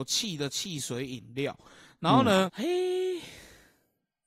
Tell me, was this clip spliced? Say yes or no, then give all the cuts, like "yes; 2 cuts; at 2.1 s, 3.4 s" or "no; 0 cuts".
yes; 1 cut; at 2.5 s